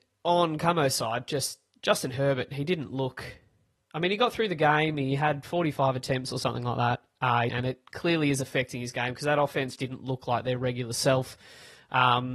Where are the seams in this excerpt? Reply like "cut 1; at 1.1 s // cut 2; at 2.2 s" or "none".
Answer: cut 1; at 7.5 s // cut 2; at 9.7 s